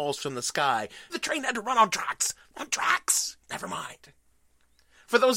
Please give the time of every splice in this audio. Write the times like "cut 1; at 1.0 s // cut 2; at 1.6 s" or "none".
cut 1; at 1.1 s // cut 2; at 3.4 s